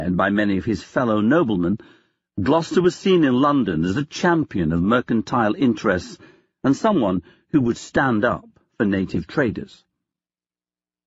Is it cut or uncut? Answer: uncut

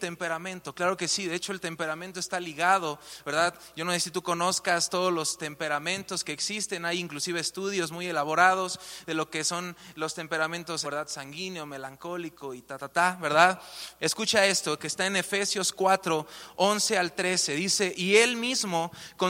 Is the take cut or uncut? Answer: cut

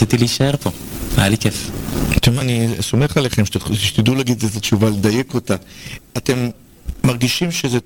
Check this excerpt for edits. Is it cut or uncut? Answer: cut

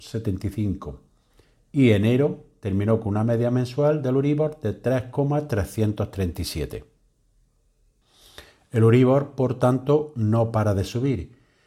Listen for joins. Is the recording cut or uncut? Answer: uncut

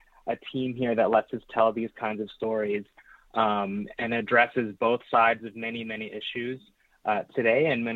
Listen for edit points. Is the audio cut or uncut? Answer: uncut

